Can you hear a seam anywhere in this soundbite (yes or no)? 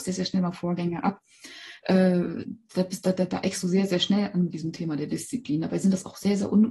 no